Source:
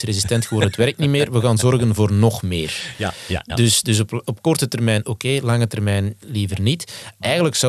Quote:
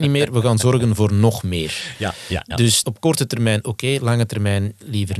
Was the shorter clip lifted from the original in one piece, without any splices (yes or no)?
no